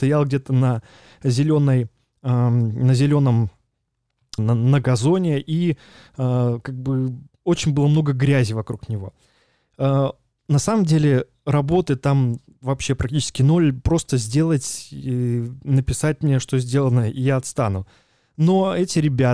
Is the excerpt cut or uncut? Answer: cut